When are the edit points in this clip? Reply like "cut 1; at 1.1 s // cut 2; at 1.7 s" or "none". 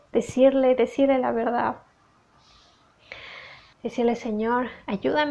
cut 1; at 3.7 s